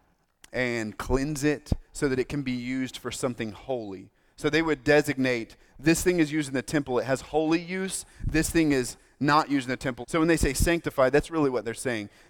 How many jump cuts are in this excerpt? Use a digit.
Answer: 1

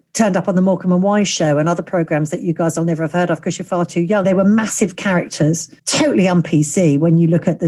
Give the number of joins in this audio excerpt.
2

